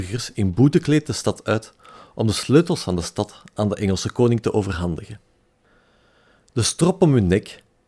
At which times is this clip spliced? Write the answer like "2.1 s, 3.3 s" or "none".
none

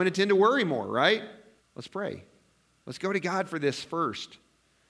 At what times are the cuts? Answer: 1.6 s

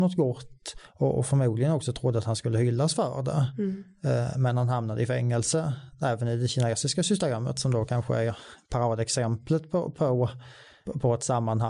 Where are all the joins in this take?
none

